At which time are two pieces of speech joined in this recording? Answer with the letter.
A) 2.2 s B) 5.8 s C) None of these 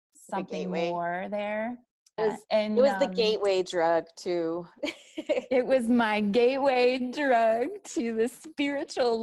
A